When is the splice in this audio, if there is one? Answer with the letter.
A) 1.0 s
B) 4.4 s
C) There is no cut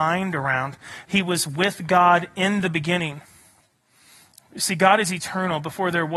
A